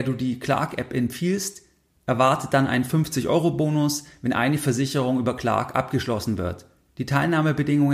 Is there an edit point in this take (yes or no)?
no